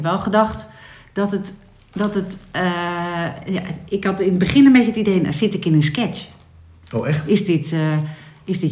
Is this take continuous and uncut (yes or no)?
yes